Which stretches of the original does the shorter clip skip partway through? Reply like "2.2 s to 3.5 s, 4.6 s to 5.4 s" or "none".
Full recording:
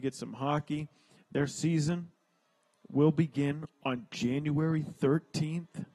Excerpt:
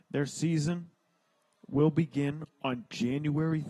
none